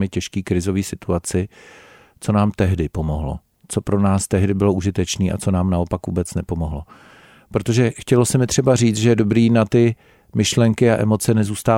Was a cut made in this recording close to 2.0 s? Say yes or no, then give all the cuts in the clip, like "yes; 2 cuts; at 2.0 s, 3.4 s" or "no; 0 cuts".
no; 0 cuts